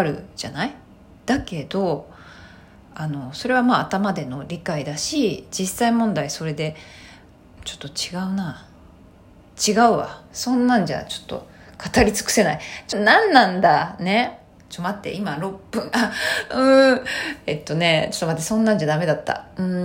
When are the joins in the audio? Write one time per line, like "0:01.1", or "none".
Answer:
0:07.6
0:12.9